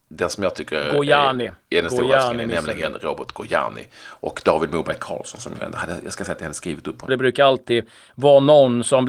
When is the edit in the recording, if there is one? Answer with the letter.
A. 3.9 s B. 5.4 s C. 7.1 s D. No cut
C